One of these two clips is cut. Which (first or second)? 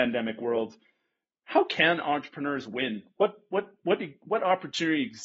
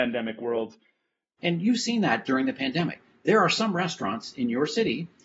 second